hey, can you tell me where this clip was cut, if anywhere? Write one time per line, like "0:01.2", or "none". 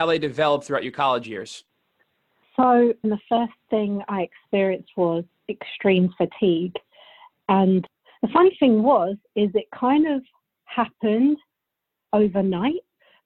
0:03.0